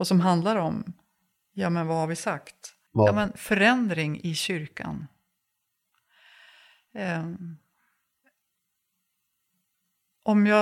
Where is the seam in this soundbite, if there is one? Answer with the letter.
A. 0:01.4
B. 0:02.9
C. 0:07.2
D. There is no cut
B